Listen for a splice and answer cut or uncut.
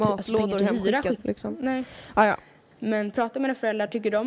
cut